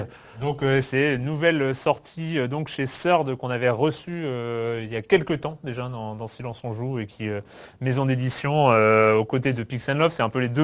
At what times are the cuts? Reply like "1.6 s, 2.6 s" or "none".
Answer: none